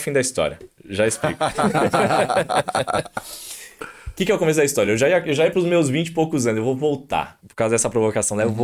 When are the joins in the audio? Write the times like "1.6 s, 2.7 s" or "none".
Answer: none